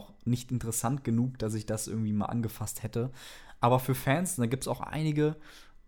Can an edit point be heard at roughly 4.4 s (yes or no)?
no